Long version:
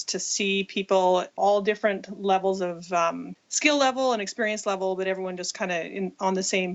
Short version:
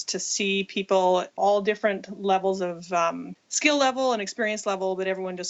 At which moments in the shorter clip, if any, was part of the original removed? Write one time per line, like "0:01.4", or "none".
none

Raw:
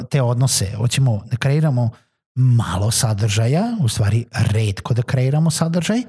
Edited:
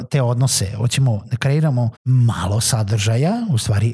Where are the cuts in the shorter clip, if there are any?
0:02.0

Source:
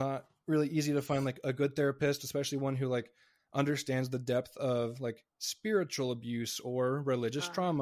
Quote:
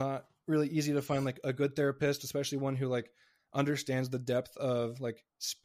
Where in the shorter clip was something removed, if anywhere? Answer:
none

